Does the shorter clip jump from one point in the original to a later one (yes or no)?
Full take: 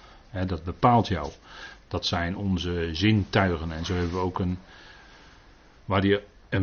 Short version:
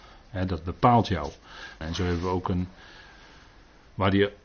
yes